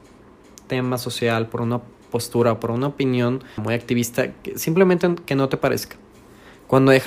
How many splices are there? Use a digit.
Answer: 1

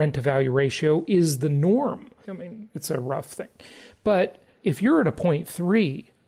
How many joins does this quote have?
1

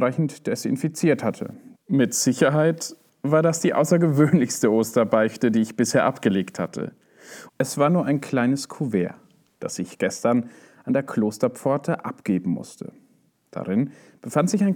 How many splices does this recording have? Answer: 2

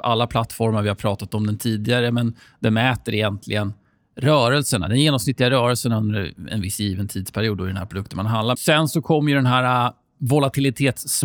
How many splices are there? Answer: 1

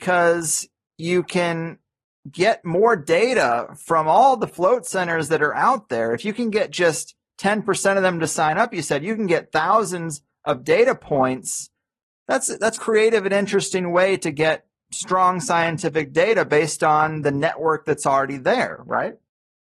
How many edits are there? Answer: 1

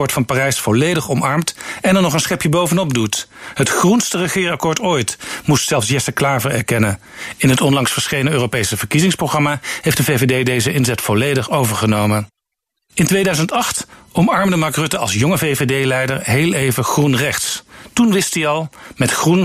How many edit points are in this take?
0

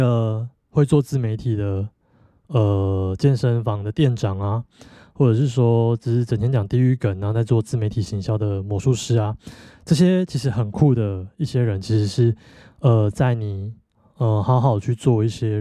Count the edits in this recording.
0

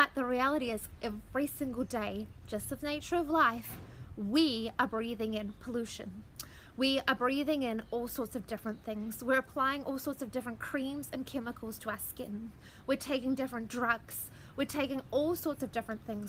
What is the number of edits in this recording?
0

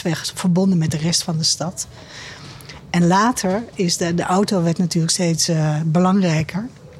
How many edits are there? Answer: 0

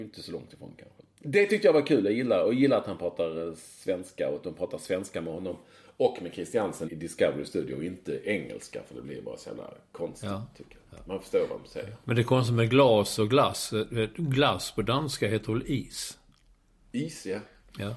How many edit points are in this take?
1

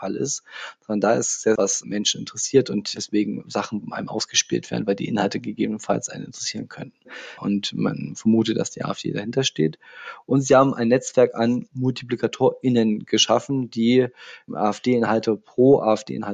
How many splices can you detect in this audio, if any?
2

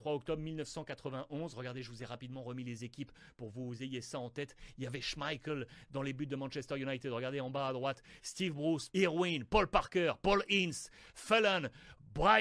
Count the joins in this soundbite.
1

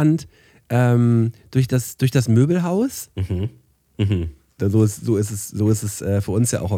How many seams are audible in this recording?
1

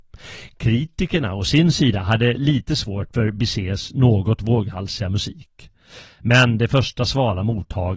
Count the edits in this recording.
0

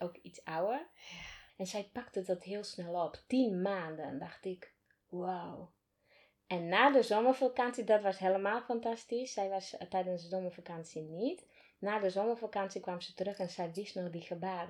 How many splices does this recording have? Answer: 1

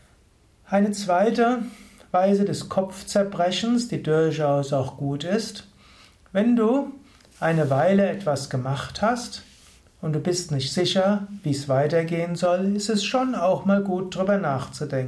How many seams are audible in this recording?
0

